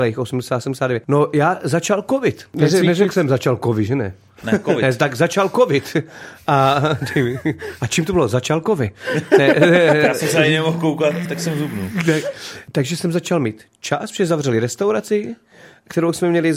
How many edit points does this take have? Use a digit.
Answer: 1